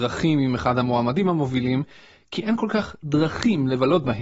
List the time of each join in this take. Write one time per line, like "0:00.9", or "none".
none